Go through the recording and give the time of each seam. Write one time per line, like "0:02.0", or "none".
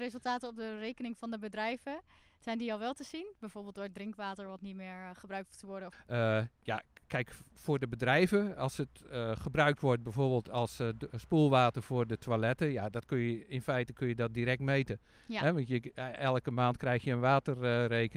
none